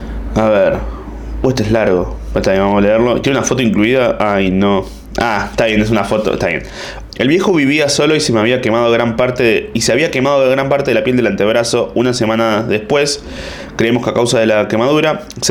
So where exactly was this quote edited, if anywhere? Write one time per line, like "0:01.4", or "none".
0:07.1